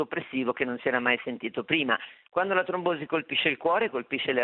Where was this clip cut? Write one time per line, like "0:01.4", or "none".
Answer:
none